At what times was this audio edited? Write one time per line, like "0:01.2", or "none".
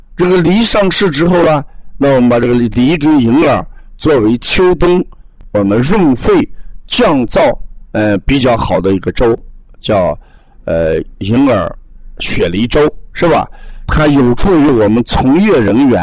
0:13.9